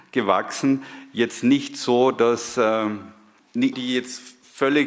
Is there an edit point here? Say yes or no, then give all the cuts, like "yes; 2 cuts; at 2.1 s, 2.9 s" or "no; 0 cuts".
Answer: yes; 1 cut; at 3.7 s